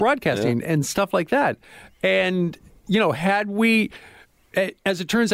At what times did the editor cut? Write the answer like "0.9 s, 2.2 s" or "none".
none